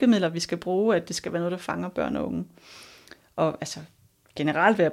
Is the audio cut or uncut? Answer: uncut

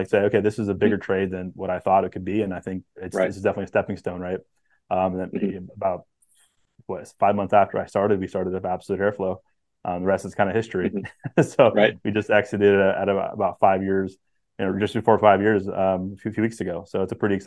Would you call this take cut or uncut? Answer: uncut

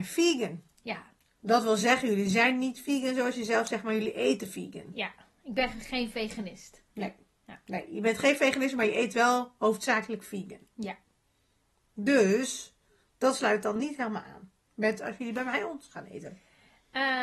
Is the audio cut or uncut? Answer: uncut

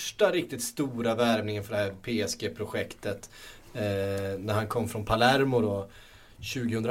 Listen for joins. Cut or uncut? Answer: uncut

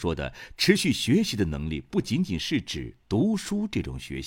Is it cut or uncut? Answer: uncut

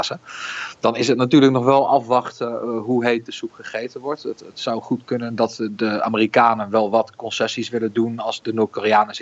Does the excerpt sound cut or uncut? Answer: uncut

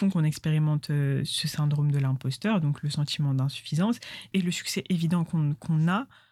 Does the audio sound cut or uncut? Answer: uncut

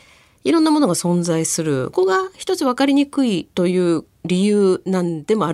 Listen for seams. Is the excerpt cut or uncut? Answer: cut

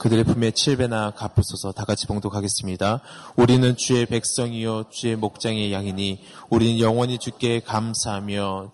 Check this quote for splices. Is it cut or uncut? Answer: uncut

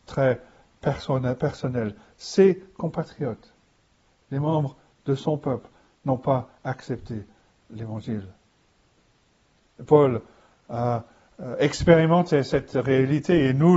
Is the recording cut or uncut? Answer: uncut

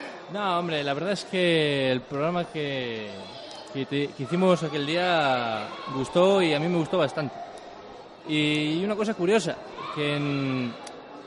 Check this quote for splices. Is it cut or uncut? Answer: uncut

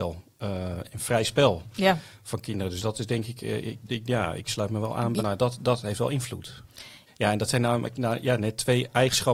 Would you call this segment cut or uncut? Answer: cut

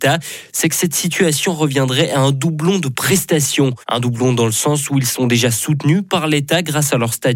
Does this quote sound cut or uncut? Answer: cut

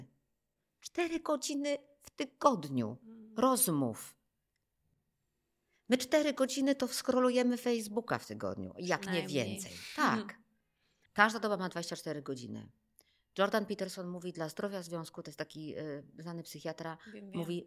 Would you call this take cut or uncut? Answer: cut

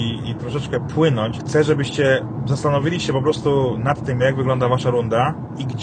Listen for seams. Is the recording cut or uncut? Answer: cut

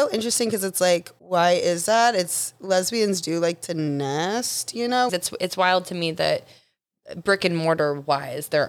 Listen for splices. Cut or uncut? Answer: cut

